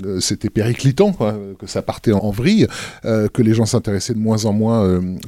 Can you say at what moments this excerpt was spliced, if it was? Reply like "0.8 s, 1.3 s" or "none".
2.2 s